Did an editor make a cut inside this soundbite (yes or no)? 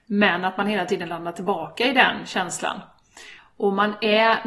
yes